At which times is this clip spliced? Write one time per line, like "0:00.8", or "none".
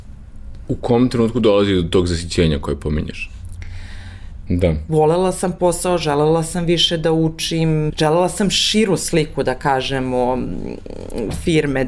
0:04.5
0:07.9